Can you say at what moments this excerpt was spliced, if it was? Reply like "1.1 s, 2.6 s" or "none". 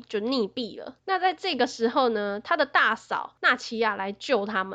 1.0 s